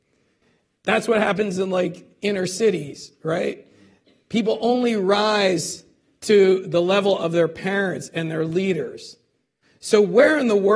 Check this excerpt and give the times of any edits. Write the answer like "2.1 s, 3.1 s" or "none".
none